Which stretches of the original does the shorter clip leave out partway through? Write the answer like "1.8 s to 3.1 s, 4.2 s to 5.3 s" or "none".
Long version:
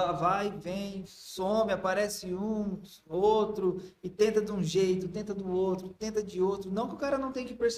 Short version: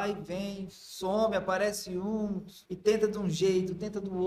3.0 s to 4.0 s